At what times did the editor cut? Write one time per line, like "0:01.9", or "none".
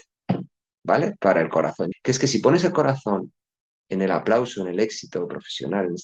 0:01.9